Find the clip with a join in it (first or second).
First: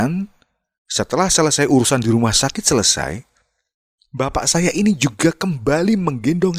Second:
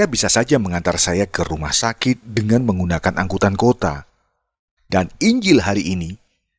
second